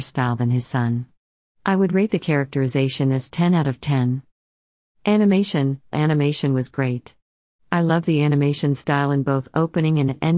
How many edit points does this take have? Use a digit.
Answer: 1